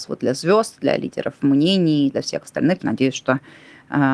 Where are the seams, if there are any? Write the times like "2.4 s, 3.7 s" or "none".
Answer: 2.8 s